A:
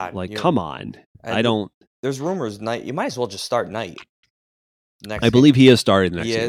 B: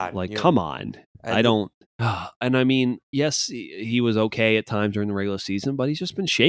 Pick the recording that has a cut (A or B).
B